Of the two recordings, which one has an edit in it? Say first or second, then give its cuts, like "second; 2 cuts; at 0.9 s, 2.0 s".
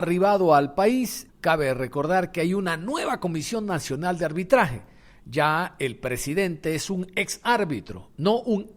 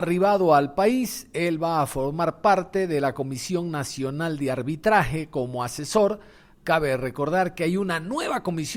first; 1 cut; at 1.3 s